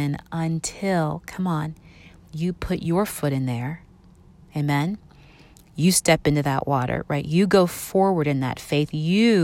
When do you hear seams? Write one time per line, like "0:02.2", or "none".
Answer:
none